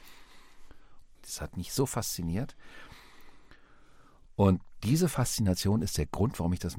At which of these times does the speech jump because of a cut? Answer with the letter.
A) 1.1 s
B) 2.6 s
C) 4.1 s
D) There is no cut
A